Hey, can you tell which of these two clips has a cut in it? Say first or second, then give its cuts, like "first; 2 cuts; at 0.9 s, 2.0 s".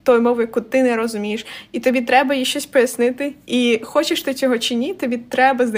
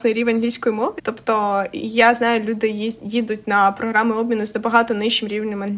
second; 1 cut; at 1.0 s